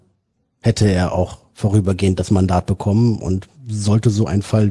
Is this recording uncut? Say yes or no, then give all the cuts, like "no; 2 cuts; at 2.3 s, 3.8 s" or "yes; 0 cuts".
yes; 0 cuts